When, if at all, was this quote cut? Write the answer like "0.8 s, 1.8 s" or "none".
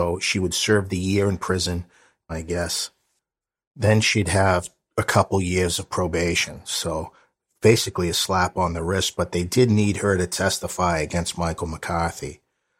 2.3 s